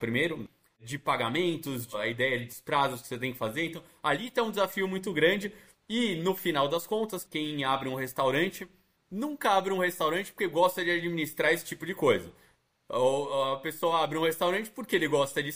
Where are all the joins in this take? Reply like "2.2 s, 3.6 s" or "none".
none